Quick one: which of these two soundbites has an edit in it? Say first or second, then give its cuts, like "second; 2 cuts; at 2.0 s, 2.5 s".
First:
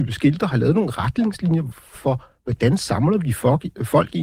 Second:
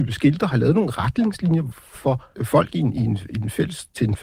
second; 1 cut; at 2.3 s